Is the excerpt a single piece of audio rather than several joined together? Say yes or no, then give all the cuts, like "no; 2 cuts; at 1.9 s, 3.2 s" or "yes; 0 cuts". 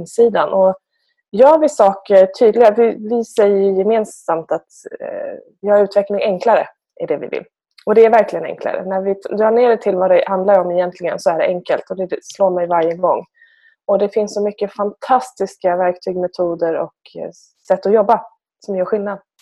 yes; 0 cuts